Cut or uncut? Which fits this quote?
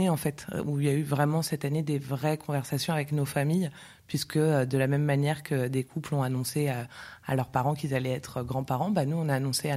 uncut